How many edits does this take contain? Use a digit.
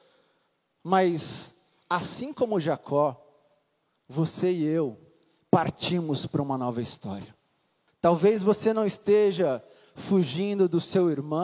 1